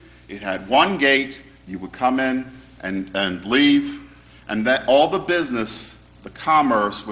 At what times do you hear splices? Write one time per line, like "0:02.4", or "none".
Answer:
none